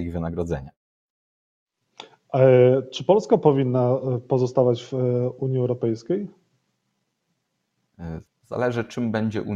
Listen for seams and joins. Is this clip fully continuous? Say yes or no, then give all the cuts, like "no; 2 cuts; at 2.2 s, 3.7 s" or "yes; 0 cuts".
yes; 0 cuts